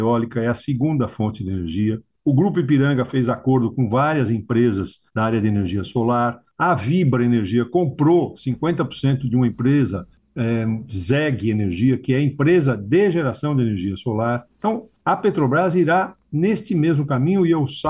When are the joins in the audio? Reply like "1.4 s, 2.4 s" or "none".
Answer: none